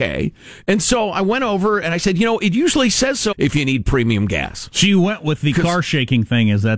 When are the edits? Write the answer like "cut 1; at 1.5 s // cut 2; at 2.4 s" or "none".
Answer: cut 1; at 3.3 s